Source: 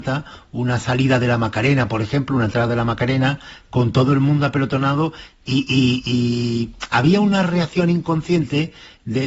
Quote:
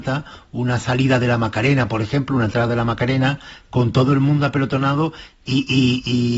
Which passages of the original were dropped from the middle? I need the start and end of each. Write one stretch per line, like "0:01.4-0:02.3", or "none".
none